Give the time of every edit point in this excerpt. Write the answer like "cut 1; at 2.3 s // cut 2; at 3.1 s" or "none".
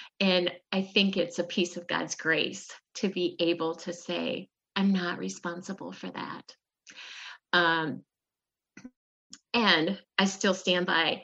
cut 1; at 4.7 s // cut 2; at 7.5 s